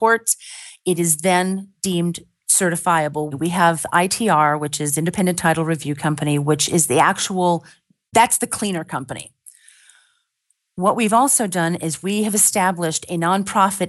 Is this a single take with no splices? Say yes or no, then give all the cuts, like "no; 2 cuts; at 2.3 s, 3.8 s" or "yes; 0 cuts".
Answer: no; 1 cut; at 3.3 s